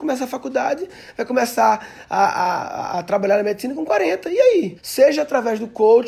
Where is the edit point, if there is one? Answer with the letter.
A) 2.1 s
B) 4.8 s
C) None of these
B